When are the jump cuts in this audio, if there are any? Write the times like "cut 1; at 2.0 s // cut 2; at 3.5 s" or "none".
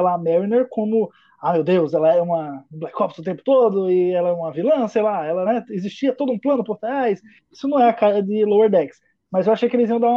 none